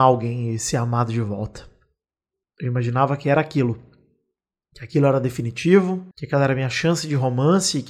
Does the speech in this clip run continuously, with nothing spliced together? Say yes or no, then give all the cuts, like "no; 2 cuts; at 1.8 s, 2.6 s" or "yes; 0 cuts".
no; 2 cuts; at 2.4 s, 6.1 s